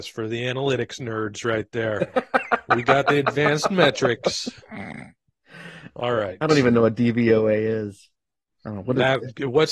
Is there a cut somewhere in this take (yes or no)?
no